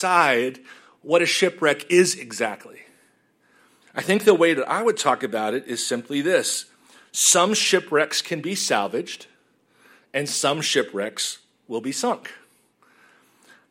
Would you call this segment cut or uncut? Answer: uncut